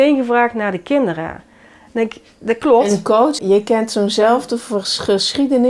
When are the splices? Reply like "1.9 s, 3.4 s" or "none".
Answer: 3.4 s